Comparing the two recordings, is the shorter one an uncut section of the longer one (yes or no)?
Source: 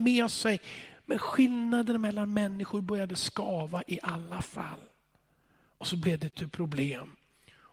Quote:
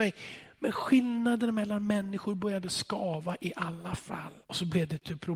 no